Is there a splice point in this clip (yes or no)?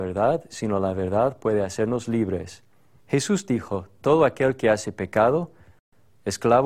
yes